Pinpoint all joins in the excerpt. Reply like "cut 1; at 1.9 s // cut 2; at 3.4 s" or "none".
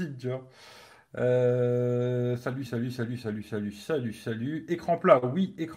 cut 1; at 2.7 s